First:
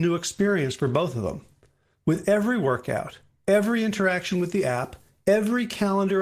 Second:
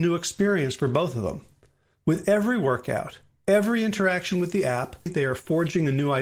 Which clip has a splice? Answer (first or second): second